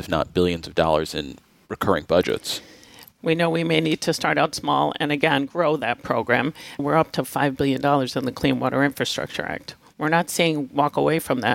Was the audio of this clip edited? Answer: no; 0 cuts

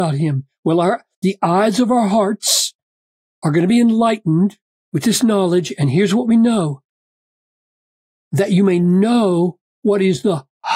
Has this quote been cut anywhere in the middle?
no; 0 cuts

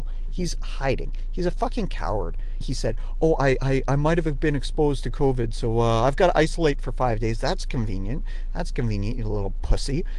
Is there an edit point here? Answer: yes; 1 cut; at 2.6 s

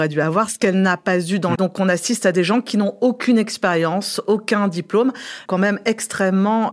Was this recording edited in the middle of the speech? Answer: yes; 2 cuts; at 1.5 s, 5.5 s

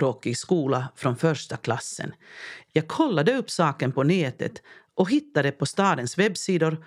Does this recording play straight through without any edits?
no; 1 cut; at 2.7 s

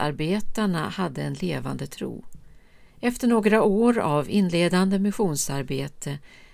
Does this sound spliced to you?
yes; 1 cut; at 2.9 s

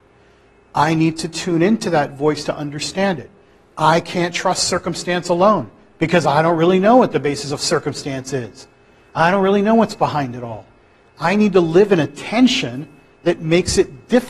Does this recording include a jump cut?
no; 0 cuts

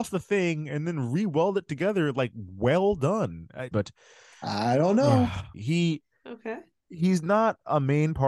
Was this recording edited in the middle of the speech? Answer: yes; 2 cuts; at 3.7 s, 5.5 s

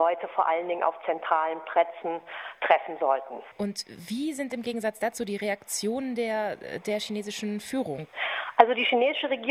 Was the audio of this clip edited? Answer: no; 0 cuts

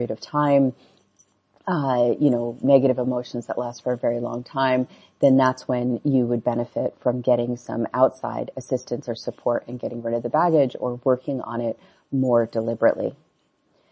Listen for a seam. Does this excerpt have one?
no; 0 cuts

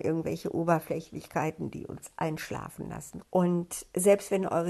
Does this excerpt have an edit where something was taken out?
yes; 1 cut; at 3.2 s

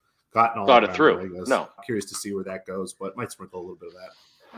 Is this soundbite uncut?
no; 1 cut; at 1.8 s

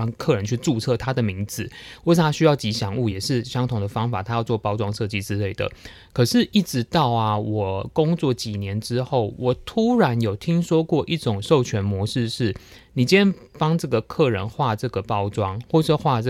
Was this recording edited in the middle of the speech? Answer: no; 0 cuts

